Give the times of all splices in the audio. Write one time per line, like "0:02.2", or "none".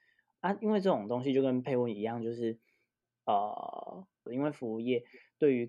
0:04.3